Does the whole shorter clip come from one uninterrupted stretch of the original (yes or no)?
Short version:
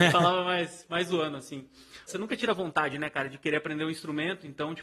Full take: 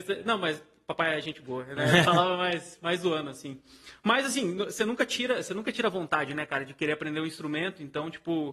no